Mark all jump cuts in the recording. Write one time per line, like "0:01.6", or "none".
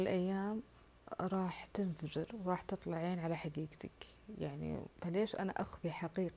0:04.9

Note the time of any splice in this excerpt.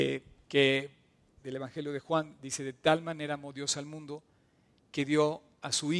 0:01.4

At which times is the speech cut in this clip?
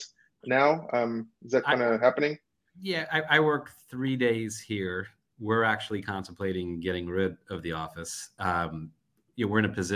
none

